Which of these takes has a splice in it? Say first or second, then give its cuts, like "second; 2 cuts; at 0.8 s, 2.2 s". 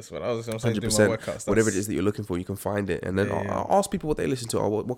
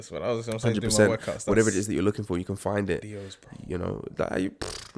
second; 1 cut; at 3.0 s